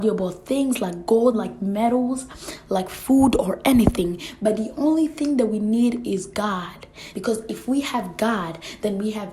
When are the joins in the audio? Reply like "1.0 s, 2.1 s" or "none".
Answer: 1.3 s, 7.1 s